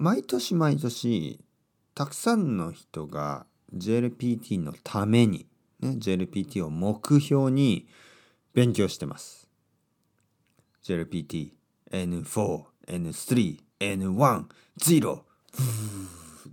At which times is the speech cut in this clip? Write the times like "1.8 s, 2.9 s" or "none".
13.7 s